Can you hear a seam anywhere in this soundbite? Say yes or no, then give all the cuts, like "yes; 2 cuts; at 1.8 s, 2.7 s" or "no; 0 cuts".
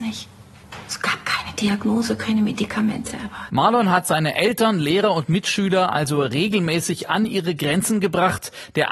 no; 0 cuts